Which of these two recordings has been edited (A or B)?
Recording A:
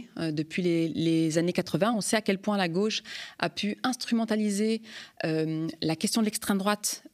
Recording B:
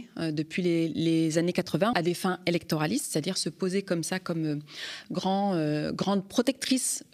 B